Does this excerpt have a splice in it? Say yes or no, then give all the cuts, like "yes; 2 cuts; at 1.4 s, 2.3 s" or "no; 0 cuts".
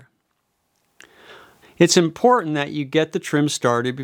yes; 1 cut; at 1.6 s